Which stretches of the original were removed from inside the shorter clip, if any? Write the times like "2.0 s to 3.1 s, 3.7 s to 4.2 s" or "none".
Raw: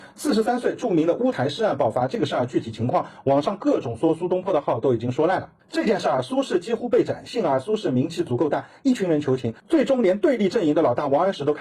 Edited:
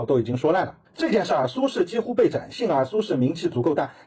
none